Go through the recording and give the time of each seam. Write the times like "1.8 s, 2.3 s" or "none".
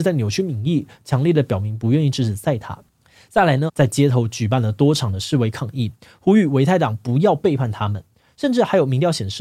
3.7 s